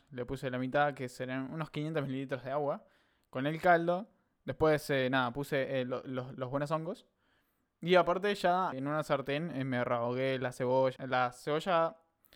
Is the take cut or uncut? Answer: cut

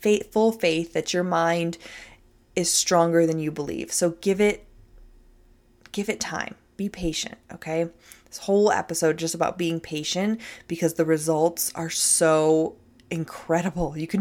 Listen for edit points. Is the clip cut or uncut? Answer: uncut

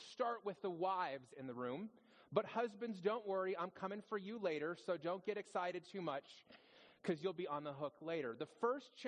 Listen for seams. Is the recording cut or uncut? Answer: uncut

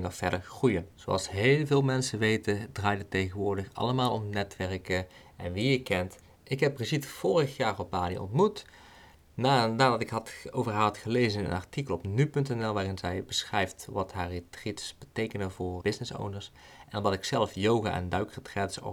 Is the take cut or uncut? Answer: cut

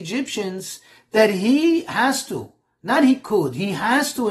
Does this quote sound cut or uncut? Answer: uncut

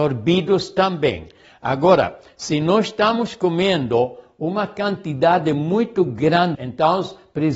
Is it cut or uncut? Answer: cut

